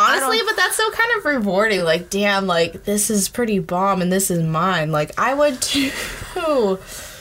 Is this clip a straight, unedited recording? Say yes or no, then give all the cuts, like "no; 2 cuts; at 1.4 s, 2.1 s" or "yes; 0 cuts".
yes; 0 cuts